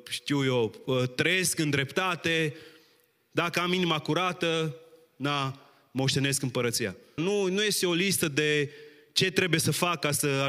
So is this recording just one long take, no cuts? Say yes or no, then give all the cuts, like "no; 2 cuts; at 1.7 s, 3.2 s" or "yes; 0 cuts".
no; 1 cut; at 7.2 s